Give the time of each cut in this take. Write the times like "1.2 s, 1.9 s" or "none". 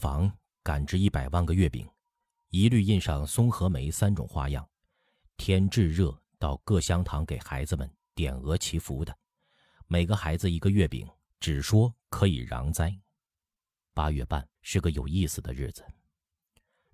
11.3 s, 13.3 s, 14.5 s